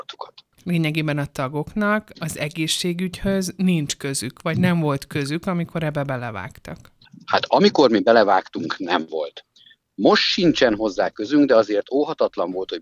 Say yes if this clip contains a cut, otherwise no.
no